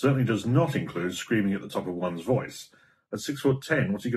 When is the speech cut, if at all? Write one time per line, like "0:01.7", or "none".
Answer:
0:03.1